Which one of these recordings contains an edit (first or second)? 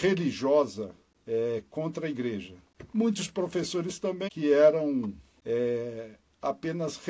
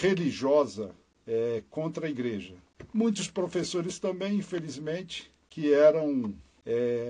first